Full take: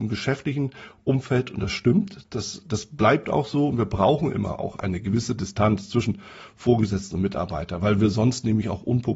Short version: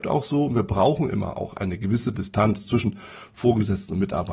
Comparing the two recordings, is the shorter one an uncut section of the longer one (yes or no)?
yes